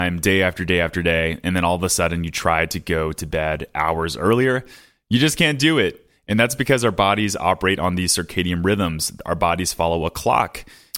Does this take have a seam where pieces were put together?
no; 0 cuts

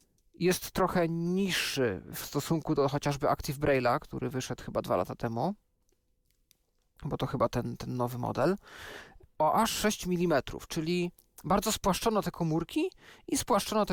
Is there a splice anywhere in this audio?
no; 0 cuts

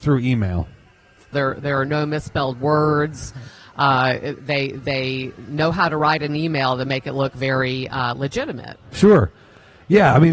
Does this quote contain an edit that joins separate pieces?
yes; 1 cut; at 1.3 s

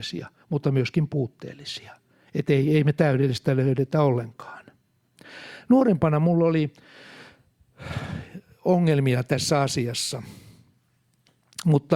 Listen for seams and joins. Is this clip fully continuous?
yes; 0 cuts

